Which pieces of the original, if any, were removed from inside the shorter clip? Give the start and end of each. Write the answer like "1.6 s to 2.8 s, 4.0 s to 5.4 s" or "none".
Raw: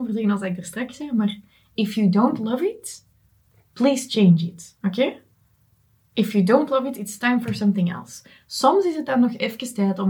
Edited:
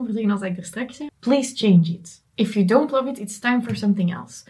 1.1 s to 3.6 s, 4.8 s to 6.1 s